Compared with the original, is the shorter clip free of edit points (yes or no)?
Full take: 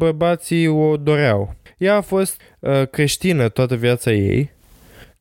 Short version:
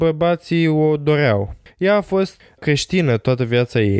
no